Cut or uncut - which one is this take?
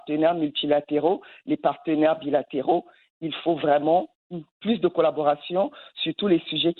uncut